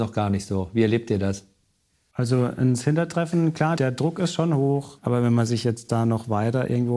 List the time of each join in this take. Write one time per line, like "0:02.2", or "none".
0:03.8
0:05.0